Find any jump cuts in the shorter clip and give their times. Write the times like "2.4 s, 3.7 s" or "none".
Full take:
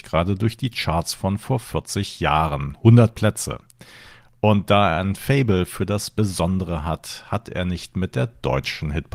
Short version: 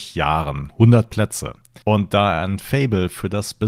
1.8 s